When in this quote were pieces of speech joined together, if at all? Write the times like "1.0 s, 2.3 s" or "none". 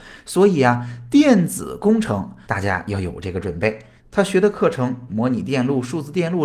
2.4 s, 4.0 s, 5.1 s